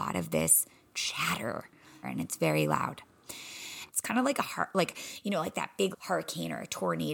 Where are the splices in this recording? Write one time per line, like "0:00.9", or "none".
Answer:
0:02.0
0:03.9
0:05.9